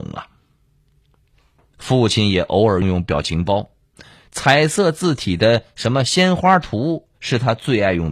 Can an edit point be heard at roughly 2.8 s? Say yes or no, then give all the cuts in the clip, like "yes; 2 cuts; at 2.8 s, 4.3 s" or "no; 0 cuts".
yes; 1 cut; at 2.8 s